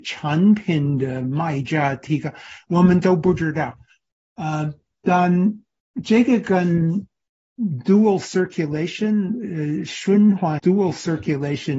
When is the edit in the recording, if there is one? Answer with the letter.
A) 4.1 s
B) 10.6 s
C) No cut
B